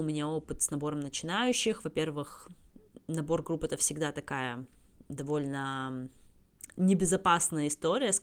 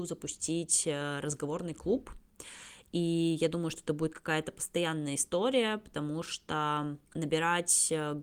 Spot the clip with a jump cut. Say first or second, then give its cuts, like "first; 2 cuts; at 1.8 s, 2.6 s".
second; 1 cut; at 7.1 s